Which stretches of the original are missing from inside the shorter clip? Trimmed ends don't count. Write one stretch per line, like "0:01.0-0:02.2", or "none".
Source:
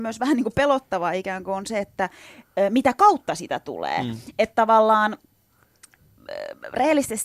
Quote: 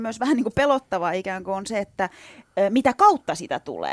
none